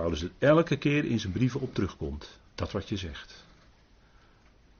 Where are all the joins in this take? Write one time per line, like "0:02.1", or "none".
0:02.5